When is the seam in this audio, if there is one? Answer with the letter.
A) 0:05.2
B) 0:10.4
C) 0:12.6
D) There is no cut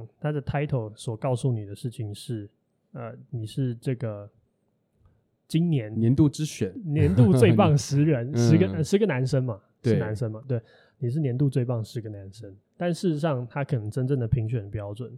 C